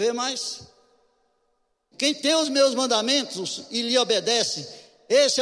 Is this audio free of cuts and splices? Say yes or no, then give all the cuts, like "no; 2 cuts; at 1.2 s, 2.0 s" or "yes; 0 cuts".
no; 1 cut; at 1.9 s